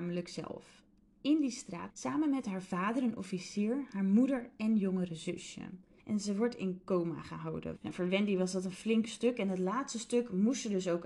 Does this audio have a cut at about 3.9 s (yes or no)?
no